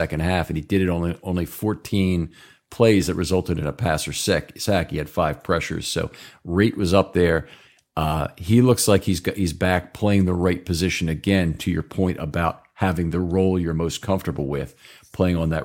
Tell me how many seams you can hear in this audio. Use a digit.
0